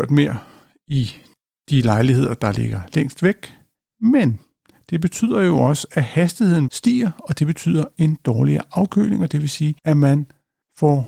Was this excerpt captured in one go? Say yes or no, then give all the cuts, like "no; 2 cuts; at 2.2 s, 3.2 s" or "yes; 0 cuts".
no; 2 cuts; at 6.7 s, 9.8 s